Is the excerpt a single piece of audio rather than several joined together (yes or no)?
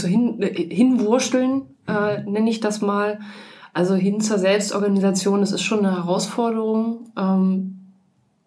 yes